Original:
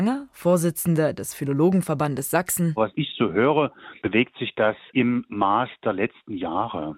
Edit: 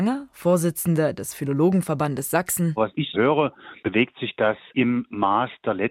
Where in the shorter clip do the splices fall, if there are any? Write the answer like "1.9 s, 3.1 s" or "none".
3.1 s